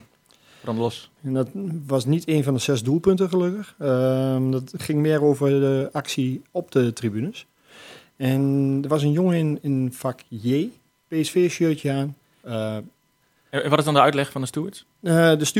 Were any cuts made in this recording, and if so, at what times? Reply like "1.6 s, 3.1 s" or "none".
1.2 s, 11.0 s, 12.4 s